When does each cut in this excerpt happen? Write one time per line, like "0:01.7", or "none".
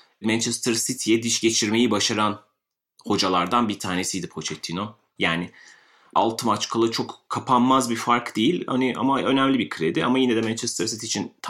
0:05.2